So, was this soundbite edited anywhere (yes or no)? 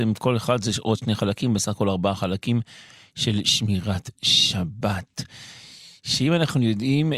no